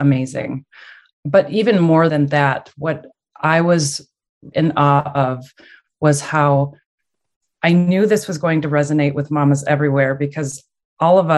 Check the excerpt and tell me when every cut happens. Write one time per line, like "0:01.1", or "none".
0:04.5

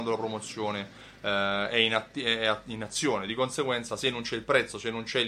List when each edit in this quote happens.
none

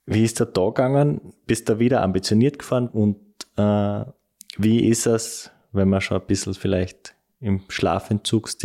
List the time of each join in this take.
0:02.9

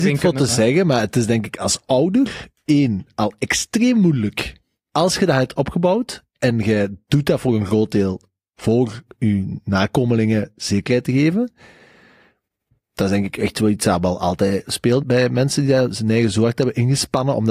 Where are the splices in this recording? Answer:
0:15.0

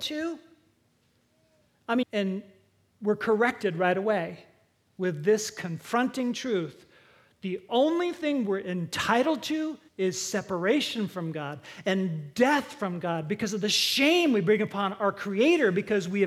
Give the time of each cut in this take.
0:02.0
0:09.9

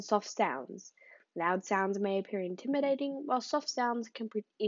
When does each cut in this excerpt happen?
none

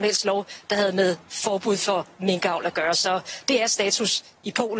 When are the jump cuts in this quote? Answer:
none

